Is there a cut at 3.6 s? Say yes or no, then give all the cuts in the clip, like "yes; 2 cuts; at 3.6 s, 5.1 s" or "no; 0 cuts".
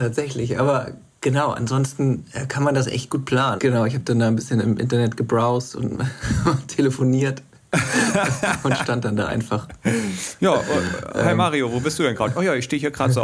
yes; 1 cut; at 3.6 s